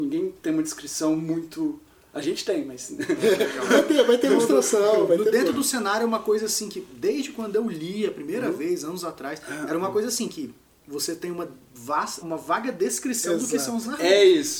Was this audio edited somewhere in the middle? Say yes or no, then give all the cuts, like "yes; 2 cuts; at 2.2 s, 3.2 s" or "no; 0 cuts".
yes; 1 cut; at 12.2 s